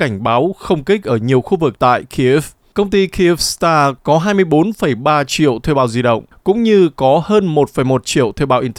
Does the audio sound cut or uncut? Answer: cut